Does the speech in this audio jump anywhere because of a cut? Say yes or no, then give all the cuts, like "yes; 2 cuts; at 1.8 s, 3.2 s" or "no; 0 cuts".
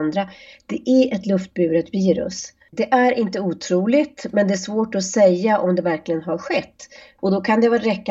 yes; 2 cuts; at 2.7 s, 7.2 s